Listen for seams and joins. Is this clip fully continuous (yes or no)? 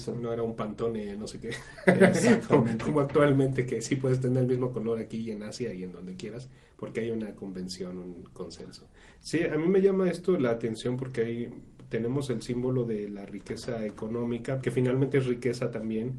no